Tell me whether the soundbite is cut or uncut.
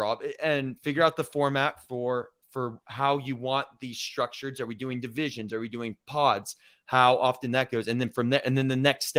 uncut